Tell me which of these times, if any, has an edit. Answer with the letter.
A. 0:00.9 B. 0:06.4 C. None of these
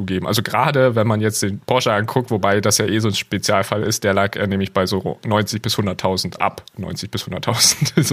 B